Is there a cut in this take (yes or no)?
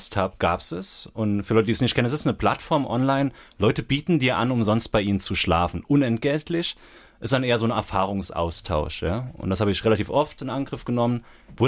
no